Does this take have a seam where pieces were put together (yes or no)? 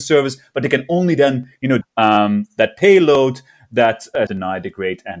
yes